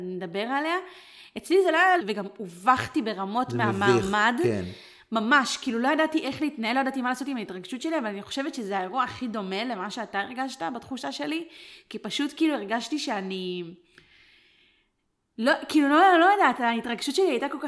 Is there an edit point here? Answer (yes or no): yes